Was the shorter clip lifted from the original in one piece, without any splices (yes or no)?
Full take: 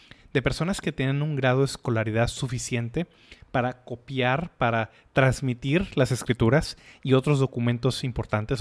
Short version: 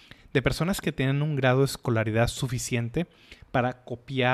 yes